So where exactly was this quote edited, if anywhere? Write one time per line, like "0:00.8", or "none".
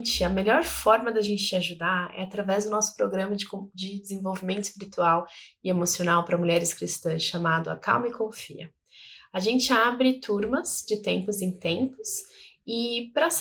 none